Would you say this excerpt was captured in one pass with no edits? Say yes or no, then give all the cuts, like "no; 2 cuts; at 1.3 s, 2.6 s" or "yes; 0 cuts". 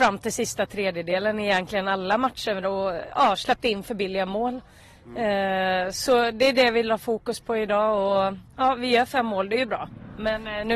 yes; 0 cuts